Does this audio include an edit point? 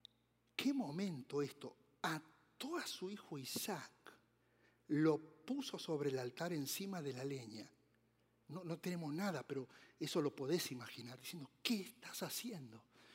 yes; 1 cut; at 8.4 s

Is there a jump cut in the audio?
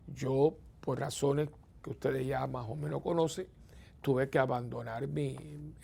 no; 0 cuts

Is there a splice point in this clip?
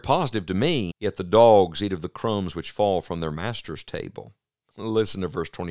yes; 1 cut; at 0.9 s

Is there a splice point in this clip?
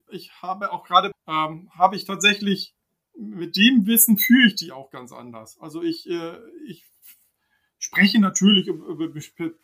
yes; 1 cut; at 1.1 s

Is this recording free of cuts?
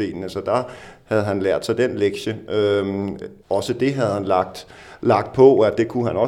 no; 1 cut; at 3.4 s

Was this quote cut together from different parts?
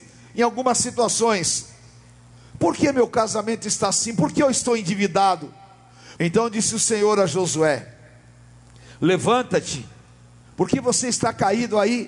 yes; 1 cut; at 6.2 s

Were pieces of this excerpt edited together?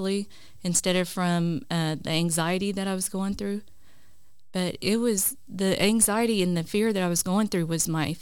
no; 0 cuts

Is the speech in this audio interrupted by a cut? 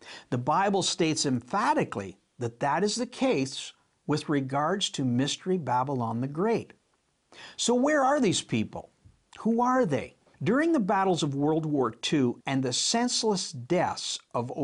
yes; 2 cuts; at 10.3 s, 12.4 s

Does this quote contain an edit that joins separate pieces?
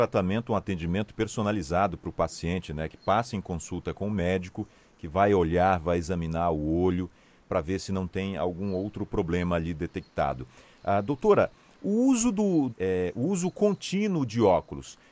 yes; 1 cut; at 12.7 s

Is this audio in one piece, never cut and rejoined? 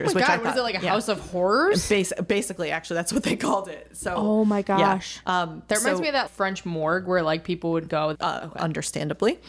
no; 2 cuts; at 6.3 s, 8.1 s

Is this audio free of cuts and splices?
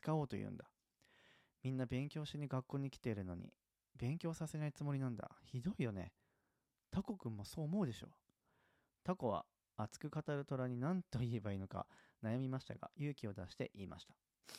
yes; 0 cuts

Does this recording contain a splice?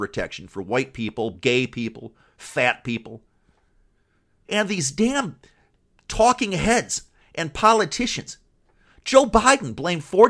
yes; 2 cuts; at 1.3 s, 4.4 s

